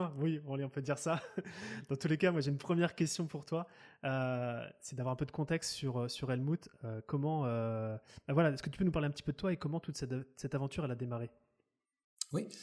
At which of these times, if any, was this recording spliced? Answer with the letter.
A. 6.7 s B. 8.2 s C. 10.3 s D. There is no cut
D